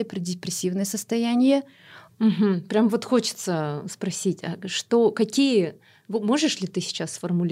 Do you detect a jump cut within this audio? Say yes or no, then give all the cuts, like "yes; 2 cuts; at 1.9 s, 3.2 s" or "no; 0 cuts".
yes; 1 cut; at 2.1 s